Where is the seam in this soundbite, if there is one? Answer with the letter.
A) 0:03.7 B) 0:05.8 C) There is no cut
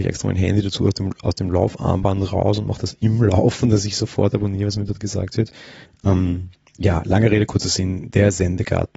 B